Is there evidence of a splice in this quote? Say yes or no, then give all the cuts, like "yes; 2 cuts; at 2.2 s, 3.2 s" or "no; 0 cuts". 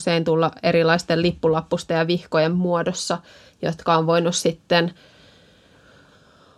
no; 0 cuts